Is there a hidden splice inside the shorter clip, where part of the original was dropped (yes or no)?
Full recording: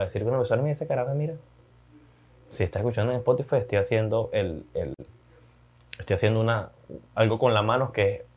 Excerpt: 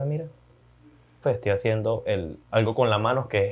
yes